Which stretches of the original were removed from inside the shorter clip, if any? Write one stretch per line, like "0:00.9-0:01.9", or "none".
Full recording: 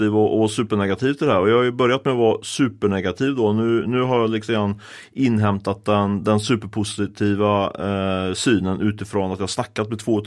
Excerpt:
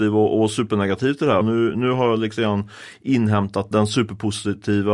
0:01.4-0:03.5
0:05.8-0:06.2